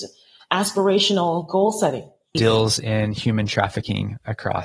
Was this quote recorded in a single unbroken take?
no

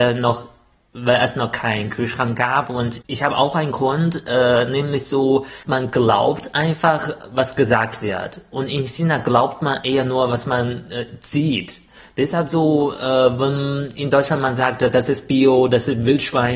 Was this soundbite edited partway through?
yes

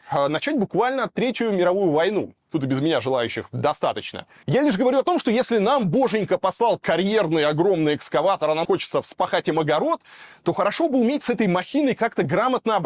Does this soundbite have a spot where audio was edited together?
yes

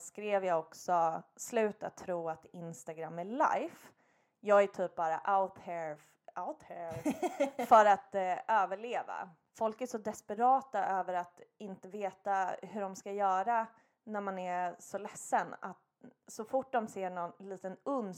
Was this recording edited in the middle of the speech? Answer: no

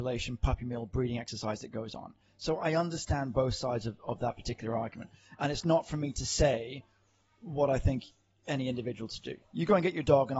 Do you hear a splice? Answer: no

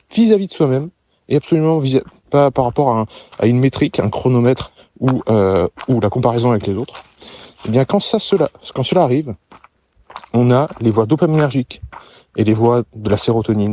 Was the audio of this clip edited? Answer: no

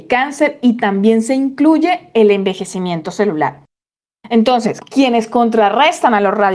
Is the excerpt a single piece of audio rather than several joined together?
no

